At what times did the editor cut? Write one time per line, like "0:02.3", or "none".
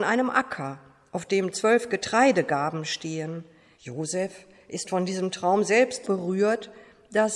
0:03.7
0:06.0